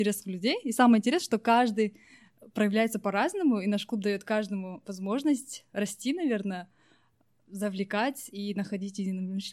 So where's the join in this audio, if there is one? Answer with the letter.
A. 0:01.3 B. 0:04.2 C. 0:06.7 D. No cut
D